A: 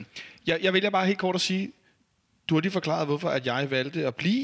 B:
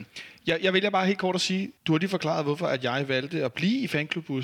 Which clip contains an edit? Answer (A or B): B